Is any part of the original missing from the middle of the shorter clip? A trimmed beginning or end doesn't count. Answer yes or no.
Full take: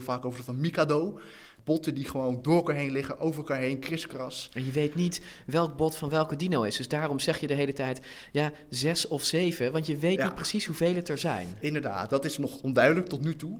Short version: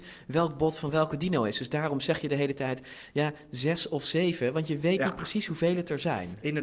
no